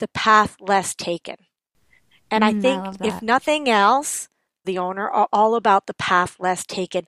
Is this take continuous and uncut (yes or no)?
no